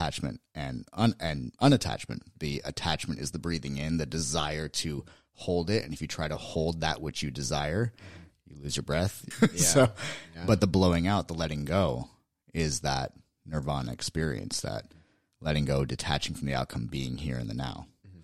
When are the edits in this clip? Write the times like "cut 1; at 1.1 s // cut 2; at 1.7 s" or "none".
cut 1; at 9.3 s

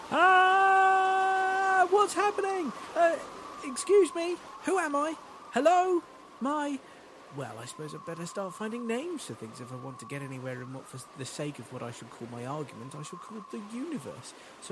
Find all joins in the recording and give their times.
cut 1; at 6.4 s

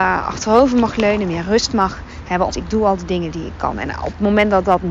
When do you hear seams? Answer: cut 1; at 2.5 s

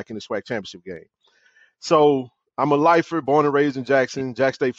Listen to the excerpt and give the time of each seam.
none

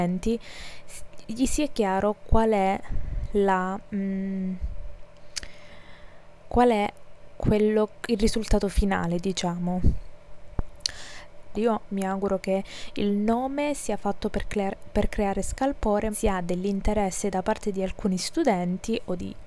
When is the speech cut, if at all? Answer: cut 1; at 11.5 s // cut 2; at 16.1 s

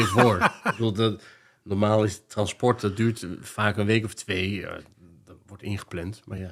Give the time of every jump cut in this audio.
none

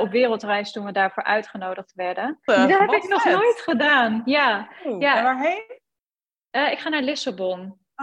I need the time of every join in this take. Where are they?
cut 1; at 2.5 s

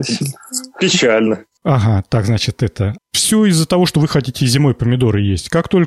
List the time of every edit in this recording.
cut 1; at 1.6 s // cut 2; at 3.0 s

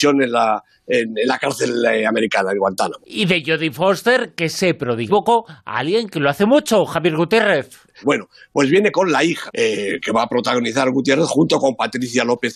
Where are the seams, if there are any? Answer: cut 1; at 5.1 s // cut 2; at 8.0 s // cut 3; at 9.5 s

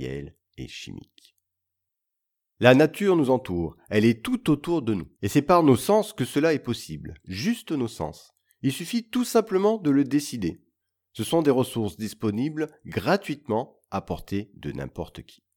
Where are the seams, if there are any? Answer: cut 1; at 5.1 s

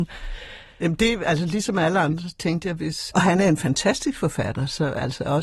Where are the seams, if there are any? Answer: cut 1; at 3.1 s

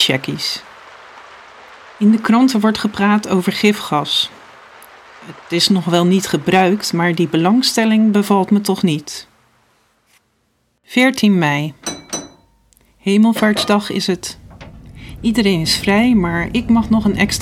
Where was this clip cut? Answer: none

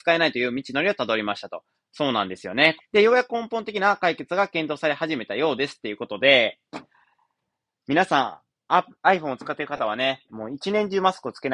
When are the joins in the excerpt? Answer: cut 1; at 2.8 s // cut 2; at 10.3 s

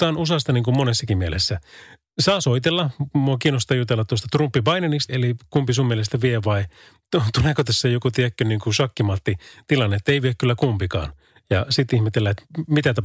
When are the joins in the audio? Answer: cut 1; at 5.1 s

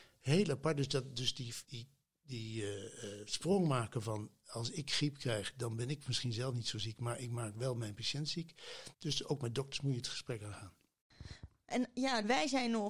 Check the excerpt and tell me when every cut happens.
cut 1; at 1.6 s // cut 2; at 8.9 s

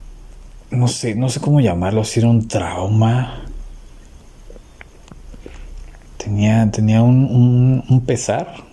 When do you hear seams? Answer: none

